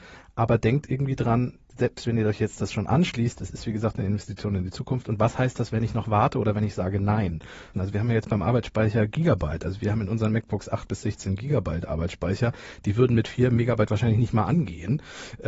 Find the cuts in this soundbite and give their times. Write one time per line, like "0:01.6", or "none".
0:07.7